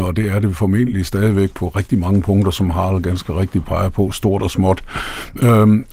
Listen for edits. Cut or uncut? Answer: uncut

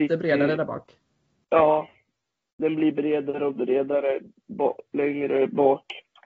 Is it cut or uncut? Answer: uncut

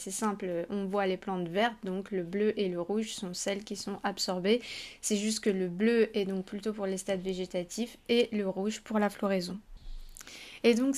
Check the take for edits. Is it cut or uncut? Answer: uncut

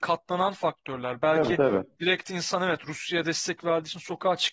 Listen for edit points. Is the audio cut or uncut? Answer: uncut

